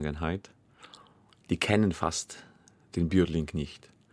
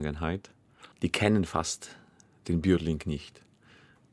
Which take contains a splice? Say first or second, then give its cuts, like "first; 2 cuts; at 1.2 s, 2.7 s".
second; 1 cut; at 0.9 s